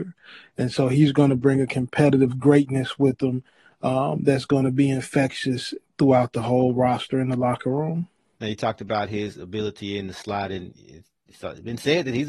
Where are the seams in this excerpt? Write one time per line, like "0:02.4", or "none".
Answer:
0:08.4